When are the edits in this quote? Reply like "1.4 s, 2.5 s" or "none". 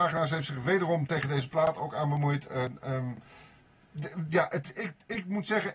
none